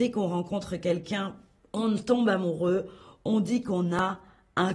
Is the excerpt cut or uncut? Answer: uncut